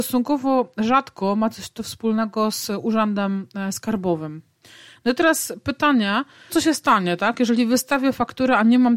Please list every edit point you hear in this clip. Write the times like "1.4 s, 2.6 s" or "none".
6.5 s